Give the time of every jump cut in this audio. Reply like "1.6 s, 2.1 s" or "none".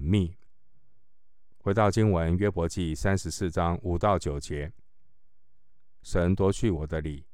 1.5 s, 6.0 s